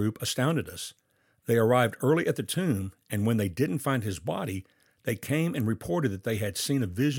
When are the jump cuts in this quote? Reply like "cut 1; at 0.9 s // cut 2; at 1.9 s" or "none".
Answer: none